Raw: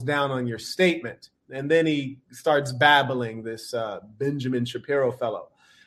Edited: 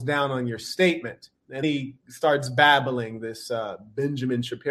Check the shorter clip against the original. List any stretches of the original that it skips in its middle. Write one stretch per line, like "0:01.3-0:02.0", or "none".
0:01.6-0:01.9